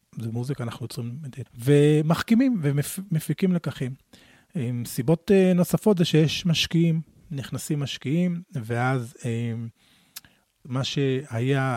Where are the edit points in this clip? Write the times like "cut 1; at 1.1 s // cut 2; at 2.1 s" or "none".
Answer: cut 1; at 1.5 s // cut 2; at 10.6 s